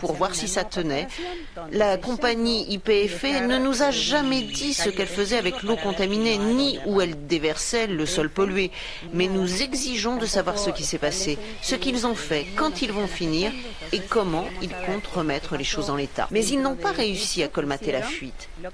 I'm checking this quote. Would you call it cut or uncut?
cut